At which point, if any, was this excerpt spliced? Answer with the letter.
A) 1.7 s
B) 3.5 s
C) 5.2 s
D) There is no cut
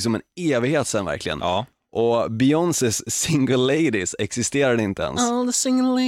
D